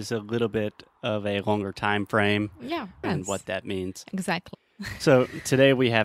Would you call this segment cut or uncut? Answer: cut